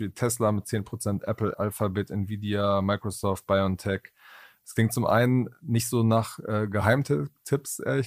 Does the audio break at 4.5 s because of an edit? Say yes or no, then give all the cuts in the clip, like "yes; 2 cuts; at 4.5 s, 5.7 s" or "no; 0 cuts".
no; 1 cut; at 1.5 s